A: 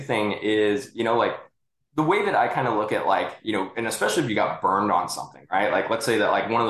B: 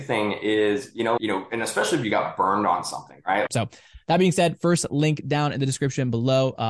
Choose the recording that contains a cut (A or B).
B